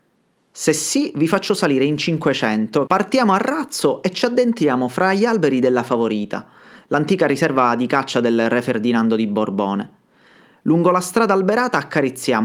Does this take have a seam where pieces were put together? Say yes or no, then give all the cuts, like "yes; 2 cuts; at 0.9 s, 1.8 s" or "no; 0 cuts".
yes; 1 cut; at 2.9 s